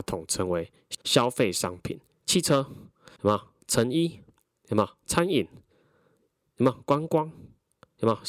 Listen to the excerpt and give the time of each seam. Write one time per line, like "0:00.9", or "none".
0:03.2